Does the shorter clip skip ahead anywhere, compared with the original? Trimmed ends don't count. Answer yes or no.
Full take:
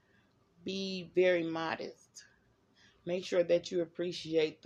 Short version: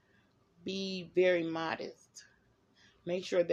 no